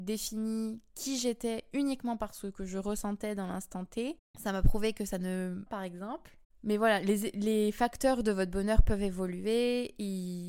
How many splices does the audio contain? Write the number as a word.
one